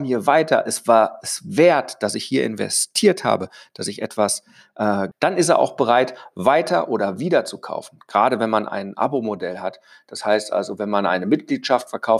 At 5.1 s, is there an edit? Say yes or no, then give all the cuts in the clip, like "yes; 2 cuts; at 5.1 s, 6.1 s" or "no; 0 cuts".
yes; 1 cut; at 5.1 s